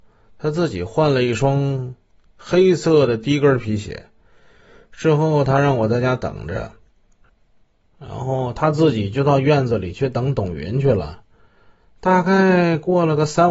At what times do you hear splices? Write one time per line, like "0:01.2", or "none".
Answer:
none